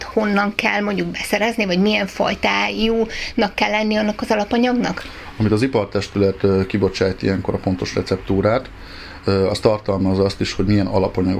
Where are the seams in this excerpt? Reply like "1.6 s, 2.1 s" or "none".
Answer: none